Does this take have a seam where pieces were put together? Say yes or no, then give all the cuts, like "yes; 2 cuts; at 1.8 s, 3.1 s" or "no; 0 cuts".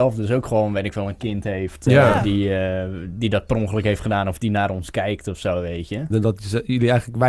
yes; 1 cut; at 6.1 s